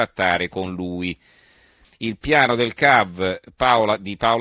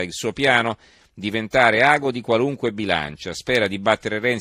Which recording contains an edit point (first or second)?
first